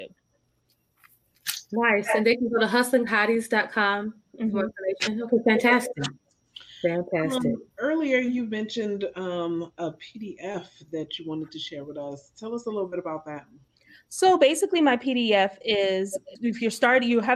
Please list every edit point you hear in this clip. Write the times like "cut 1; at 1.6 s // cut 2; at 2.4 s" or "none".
cut 1; at 7.7 s // cut 2; at 16.4 s